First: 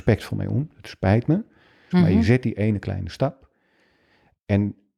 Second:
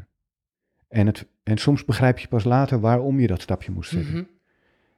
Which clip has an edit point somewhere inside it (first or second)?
first